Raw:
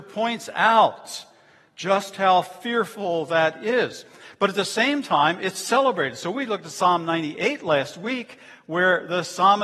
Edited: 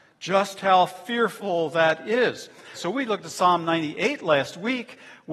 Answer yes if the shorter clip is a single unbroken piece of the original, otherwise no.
no